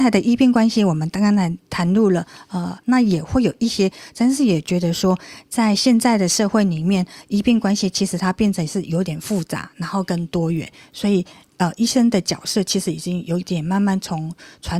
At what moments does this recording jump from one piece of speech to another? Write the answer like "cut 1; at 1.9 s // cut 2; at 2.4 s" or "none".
cut 1; at 2.8 s